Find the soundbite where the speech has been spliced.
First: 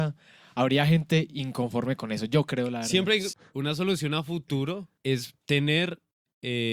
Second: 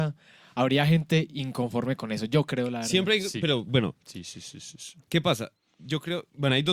first; 2 cuts; at 3.3 s, 5.0 s

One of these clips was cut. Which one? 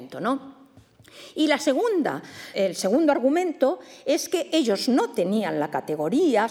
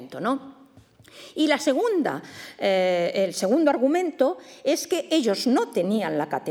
first; 1 cut; at 2.5 s

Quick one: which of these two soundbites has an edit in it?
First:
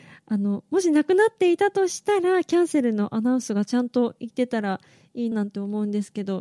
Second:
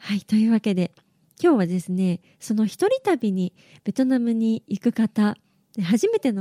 first; 1 cut; at 5.3 s

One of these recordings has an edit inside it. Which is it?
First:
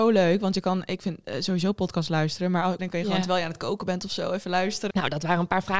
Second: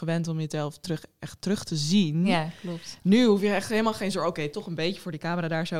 first; 2 cuts; at 2.8 s, 4.9 s

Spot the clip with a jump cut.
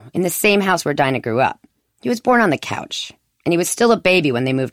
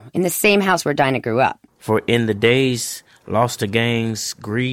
second; 1 cut; at 1.7 s

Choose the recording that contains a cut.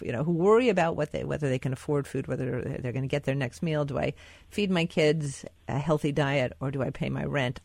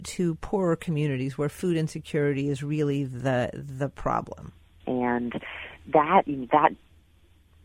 second; 1 cut; at 4.8 s

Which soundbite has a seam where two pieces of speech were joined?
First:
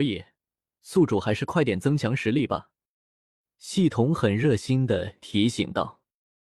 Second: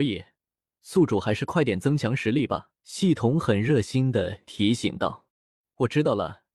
second; 2 cuts; at 2.8 s, 5.3 s

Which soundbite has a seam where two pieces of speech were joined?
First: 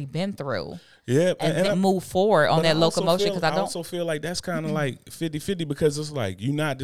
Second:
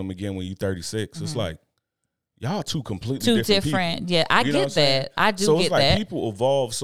first; 1 cut; at 1.6 s

